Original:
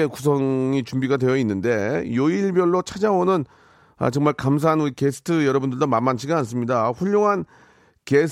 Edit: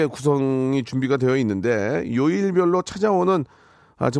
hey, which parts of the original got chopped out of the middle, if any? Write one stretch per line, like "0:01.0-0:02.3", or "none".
none